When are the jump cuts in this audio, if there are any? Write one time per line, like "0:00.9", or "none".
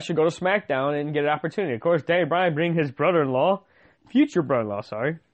none